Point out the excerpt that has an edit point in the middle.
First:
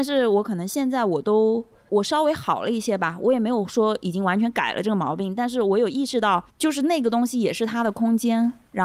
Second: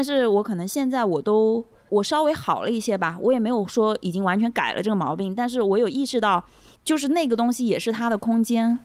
first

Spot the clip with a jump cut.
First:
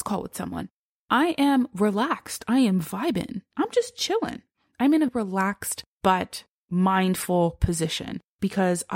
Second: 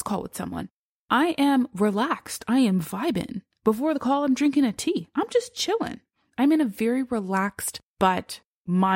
first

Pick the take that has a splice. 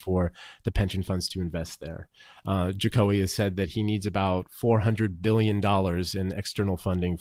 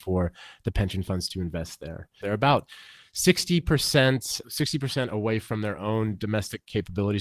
second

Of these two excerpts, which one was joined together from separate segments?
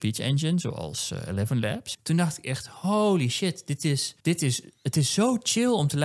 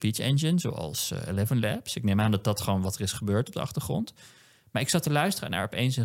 first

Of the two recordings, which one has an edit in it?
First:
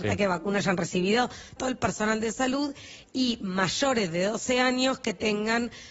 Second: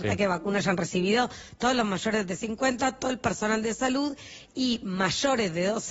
first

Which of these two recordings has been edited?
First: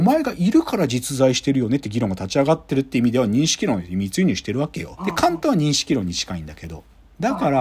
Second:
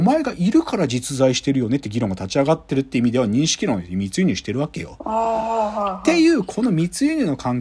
first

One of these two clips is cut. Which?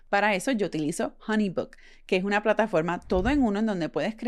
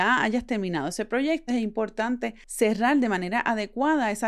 second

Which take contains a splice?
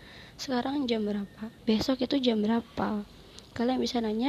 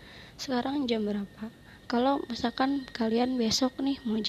first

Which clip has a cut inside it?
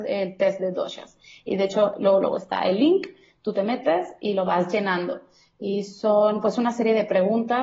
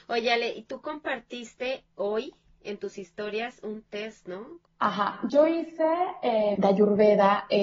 second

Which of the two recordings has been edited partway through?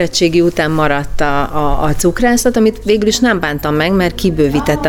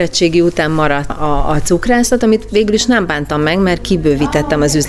second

